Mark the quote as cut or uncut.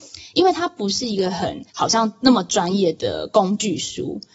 cut